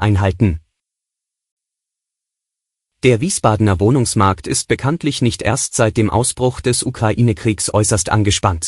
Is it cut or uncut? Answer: uncut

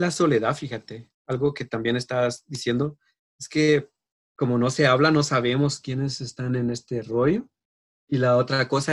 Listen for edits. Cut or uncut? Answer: uncut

